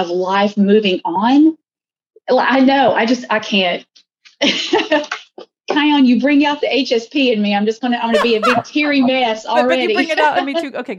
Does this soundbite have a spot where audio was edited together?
no; 0 cuts

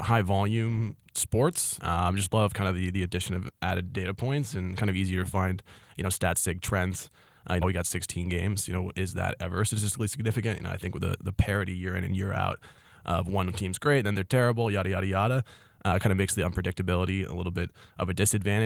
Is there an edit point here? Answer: yes; 2 cuts; at 1.8 s, 7.6 s

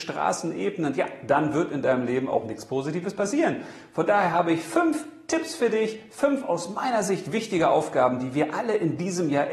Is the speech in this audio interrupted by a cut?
no; 0 cuts

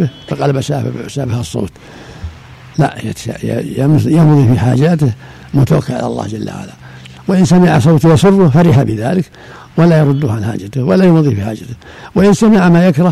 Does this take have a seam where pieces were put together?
no; 0 cuts

